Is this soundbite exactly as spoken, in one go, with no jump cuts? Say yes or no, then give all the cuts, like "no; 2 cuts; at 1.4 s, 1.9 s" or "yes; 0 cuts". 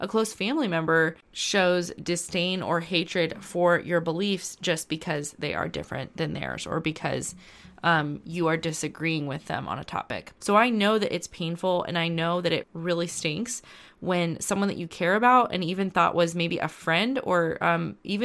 no; 2 cuts; at 10.4 s, 12.6 s